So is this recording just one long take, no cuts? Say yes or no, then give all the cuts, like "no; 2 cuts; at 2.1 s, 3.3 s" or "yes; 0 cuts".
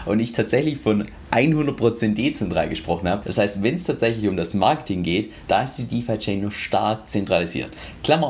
no; 1 cut; at 3.2 s